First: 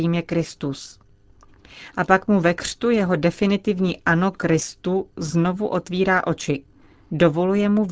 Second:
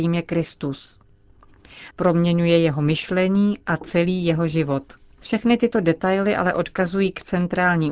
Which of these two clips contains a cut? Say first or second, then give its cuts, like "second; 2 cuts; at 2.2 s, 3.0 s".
second; 2 cuts; at 1.9 s, 5.2 s